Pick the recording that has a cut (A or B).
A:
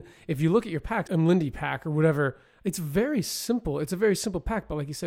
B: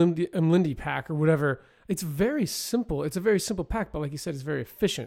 A